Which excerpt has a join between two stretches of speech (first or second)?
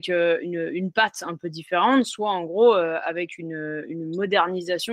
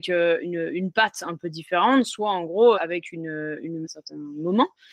second